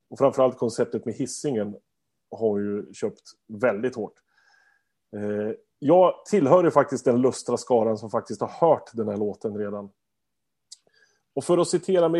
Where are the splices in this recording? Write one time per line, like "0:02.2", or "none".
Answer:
none